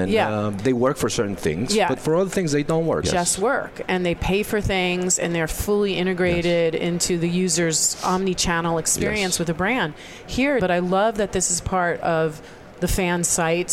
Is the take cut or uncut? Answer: cut